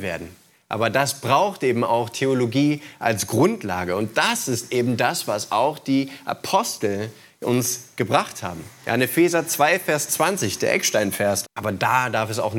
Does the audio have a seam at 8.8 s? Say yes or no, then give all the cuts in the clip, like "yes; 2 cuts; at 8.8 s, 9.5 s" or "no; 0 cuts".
yes; 2 cuts; at 8.8 s, 11.4 s